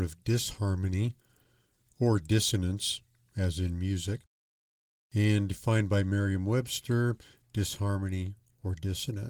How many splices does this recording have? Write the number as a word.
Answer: one